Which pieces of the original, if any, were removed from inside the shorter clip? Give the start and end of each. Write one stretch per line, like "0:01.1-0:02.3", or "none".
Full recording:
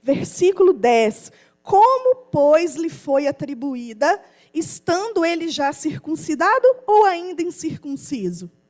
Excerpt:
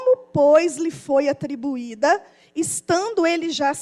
none